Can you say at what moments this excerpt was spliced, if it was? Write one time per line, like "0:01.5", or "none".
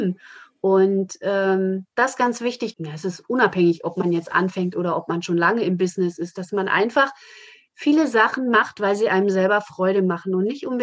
0:02.7